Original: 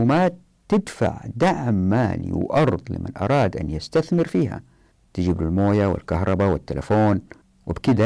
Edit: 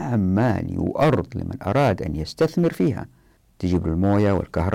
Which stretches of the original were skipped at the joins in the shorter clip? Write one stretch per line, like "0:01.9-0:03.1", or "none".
none